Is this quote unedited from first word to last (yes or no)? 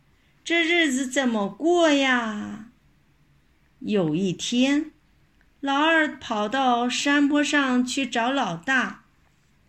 yes